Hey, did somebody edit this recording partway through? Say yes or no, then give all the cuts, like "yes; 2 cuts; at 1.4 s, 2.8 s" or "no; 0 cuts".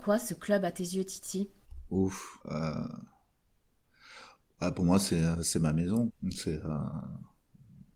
yes; 2 cuts; at 2.4 s, 6.1 s